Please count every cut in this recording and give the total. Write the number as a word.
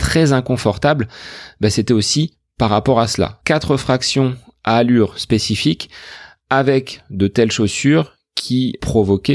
one